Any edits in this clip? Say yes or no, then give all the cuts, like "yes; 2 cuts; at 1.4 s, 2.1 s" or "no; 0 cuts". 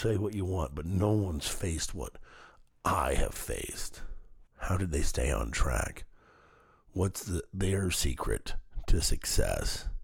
yes; 1 cut; at 4.5 s